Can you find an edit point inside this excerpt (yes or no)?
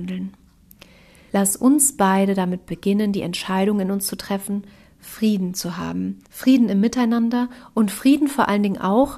yes